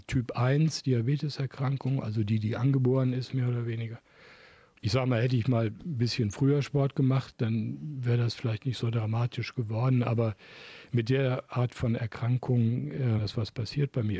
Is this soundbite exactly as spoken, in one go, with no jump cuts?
no; 1 cut; at 13.2 s

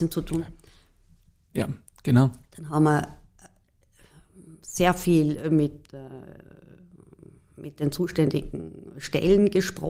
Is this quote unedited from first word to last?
yes; 0 cuts

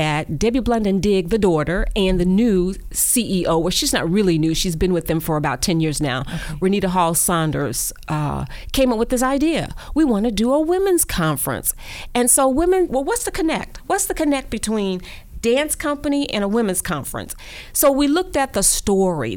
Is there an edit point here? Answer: yes; 1 cut; at 12.9 s

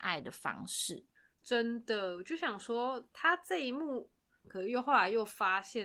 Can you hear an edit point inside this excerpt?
yes; 1 cut; at 4.4 s

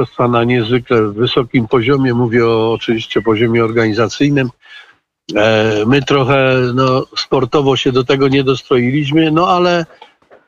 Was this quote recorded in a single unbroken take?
yes; 0 cuts

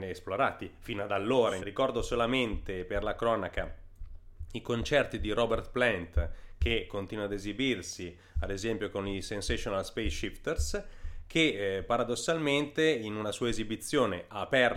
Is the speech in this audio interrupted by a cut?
yes; 1 cut; at 1.6 s

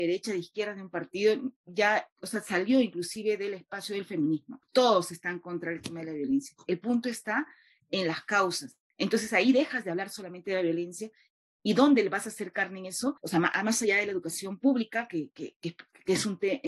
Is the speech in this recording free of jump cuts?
yes; 0 cuts

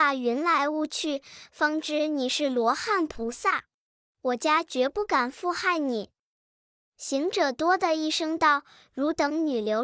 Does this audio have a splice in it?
no; 0 cuts

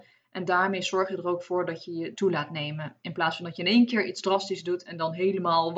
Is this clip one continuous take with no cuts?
no; 1 cut; at 2.1 s

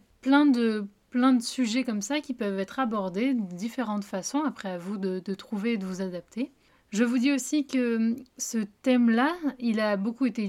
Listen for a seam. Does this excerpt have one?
no; 0 cuts

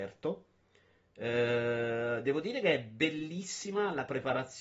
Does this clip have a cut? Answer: no; 0 cuts

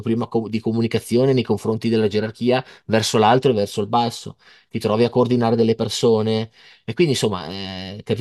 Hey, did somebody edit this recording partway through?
no; 0 cuts

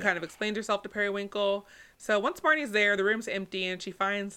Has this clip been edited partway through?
no; 0 cuts

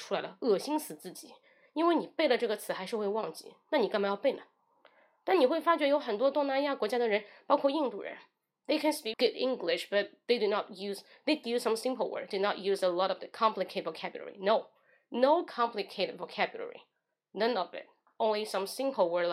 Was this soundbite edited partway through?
yes; 2 cuts; at 9.1 s, 11.4 s

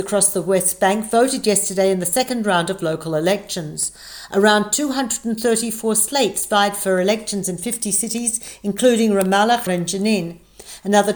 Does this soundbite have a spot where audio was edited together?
yes; 1 cut; at 9.7 s

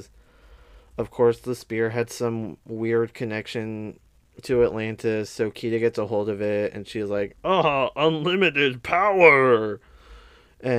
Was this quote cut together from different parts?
no; 0 cuts

